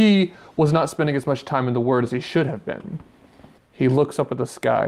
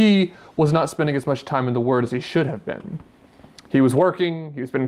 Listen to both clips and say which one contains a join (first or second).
first